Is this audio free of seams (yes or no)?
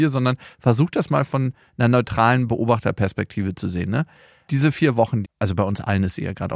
no